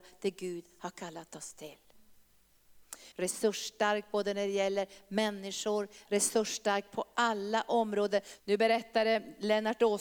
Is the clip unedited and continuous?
no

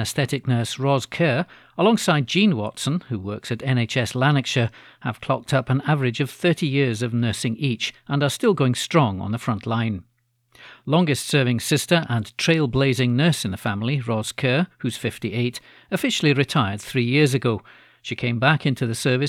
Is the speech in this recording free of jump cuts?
yes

